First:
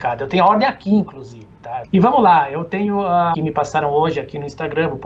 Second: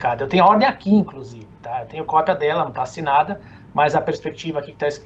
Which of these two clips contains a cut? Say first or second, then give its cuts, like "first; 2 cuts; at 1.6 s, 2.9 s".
first; 2 cuts; at 1.8 s, 3.3 s